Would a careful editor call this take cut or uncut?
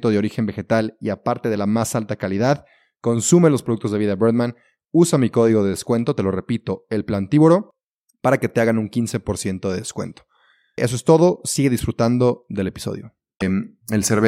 uncut